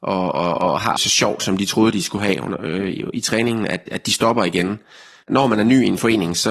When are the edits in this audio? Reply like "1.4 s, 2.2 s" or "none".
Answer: 1.0 s

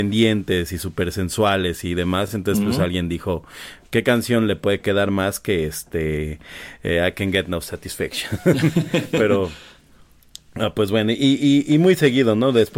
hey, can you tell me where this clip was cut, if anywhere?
none

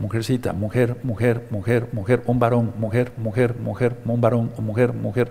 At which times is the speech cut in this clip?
none

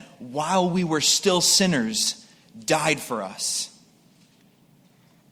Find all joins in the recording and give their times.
none

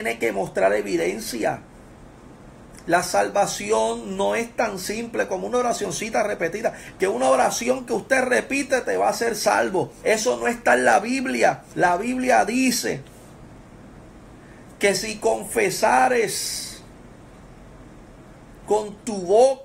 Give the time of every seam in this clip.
6.9 s, 10.0 s, 11.7 s

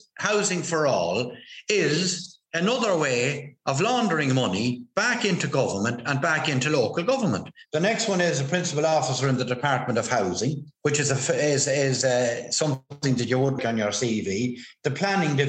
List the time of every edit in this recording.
7.7 s, 13.6 s

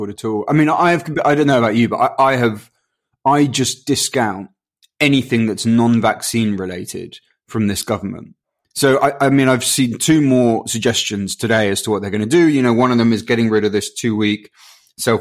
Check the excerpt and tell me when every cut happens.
none

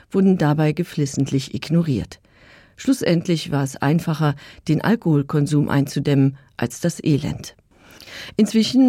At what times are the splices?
none

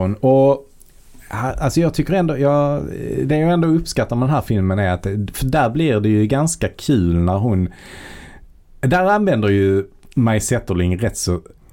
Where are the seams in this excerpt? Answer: none

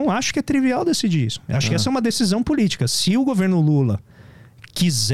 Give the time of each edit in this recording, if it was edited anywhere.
none

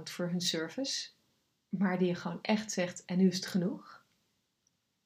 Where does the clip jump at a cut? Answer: none

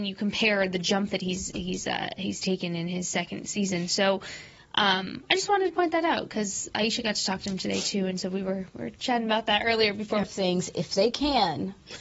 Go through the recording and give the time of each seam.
10.2 s

